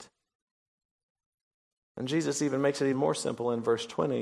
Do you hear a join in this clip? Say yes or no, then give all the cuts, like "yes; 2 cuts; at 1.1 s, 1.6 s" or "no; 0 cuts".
yes; 1 cut; at 2.9 s